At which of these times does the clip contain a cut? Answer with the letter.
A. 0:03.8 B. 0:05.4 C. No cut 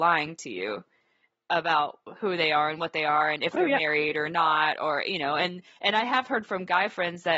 C